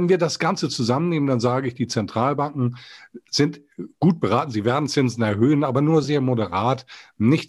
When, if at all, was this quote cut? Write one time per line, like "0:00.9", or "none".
0:06.0